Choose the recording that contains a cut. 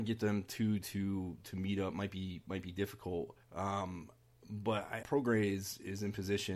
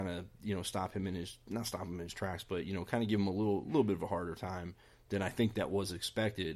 first; 2 cuts; at 3.4 s, 5.0 s

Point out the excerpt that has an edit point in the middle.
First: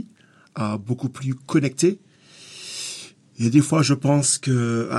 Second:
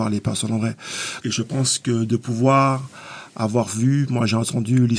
second; 1 cut; at 1.2 s

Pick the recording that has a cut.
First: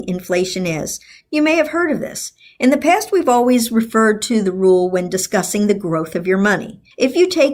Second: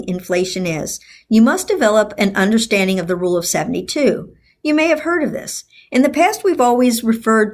first; 1 cut; at 1.2 s

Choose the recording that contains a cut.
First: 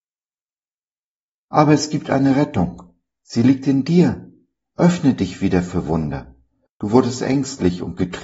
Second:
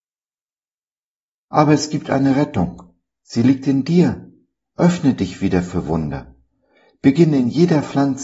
first; 1 cut; at 6.7 s

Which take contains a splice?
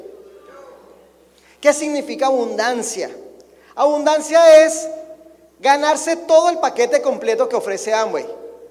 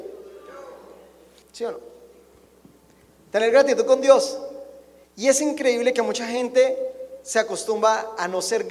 second; 2 cuts; at 1.4 s, 5.0 s

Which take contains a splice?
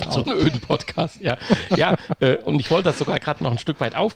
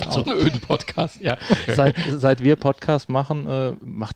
second; 1 cut; at 1.7 s

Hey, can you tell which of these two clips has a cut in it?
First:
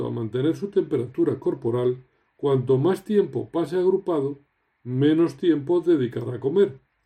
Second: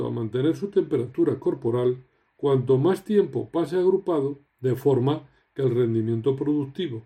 second; 1 cut; at 4.5 s

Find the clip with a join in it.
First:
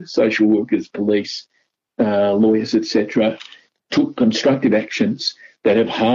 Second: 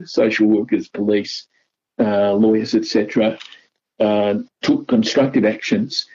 first; 1 cut; at 3.8 s

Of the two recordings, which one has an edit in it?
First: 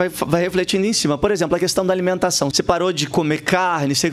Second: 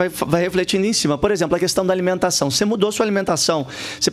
first; 1 cut; at 2.5 s

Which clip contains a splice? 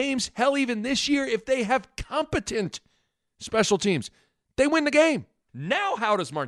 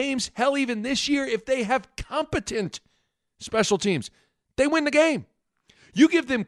first; 1 cut; at 5.5 s

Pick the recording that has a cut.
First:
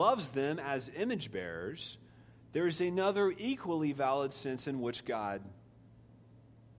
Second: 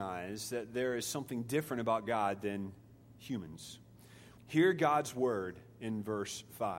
second; 1 cut; at 4.4 s

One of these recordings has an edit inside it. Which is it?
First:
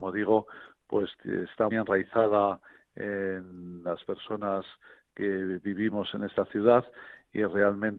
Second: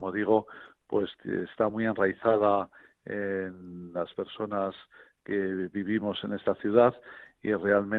first; 1 cut; at 1.7 s

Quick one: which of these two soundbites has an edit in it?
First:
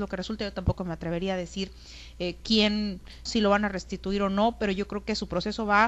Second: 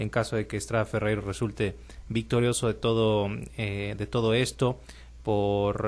first; 1 cut; at 3.3 s

